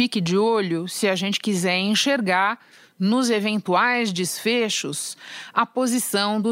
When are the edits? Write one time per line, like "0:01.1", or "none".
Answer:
none

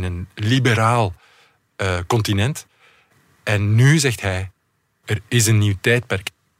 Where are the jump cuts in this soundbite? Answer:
none

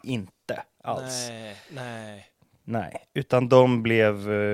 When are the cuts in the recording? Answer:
none

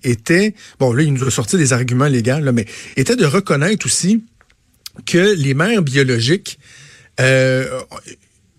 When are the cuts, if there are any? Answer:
none

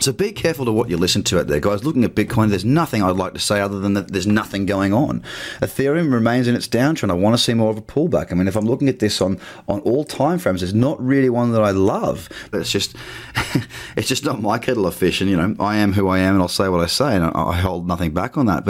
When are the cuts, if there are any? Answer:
0:12.5

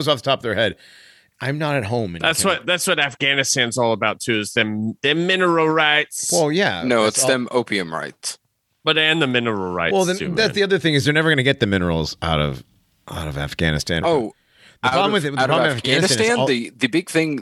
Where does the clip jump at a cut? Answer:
0:14.0

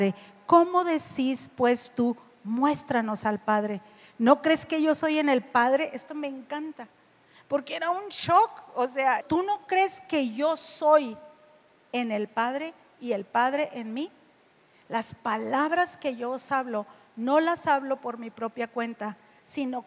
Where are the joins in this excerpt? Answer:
0:09.2

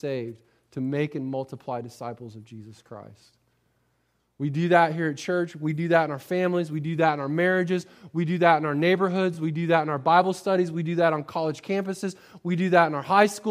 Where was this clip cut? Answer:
none

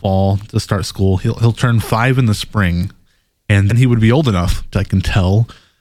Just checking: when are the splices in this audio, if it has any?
0:03.7
0:04.7

